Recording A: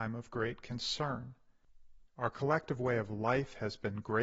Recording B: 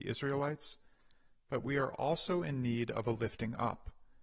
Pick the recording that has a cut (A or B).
A